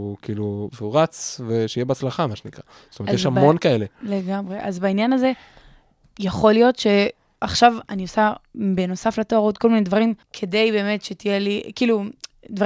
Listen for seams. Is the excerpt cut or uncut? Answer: cut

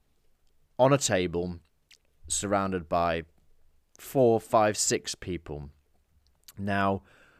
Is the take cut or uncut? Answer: uncut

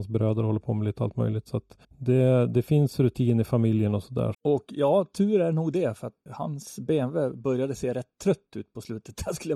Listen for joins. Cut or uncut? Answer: cut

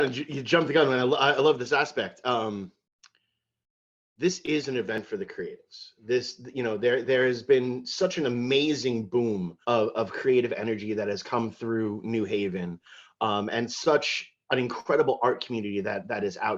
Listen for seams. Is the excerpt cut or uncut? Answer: cut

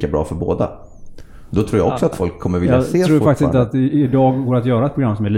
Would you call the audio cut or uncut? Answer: uncut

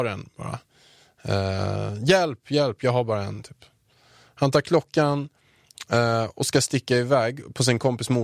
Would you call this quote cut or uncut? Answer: uncut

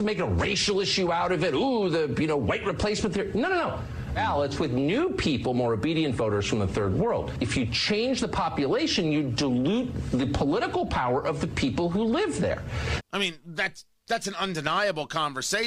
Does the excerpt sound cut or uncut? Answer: cut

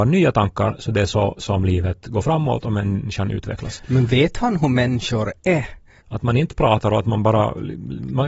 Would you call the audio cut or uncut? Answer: cut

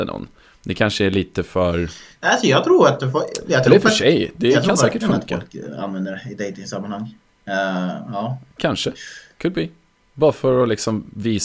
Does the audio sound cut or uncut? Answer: uncut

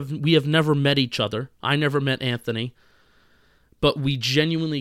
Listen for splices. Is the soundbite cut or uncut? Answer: uncut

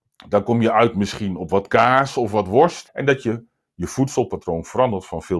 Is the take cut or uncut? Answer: cut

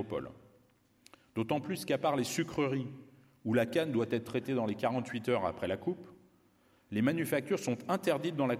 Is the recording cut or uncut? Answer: uncut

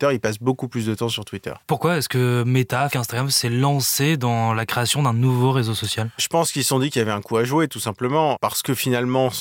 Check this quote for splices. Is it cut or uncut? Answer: cut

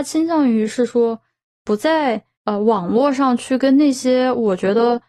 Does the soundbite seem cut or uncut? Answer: uncut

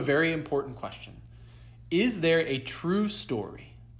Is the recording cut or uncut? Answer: uncut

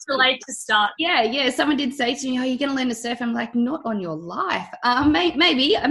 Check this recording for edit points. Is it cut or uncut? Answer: cut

